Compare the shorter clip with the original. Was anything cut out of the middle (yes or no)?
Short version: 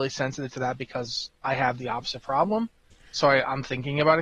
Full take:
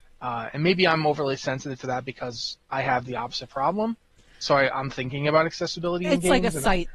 no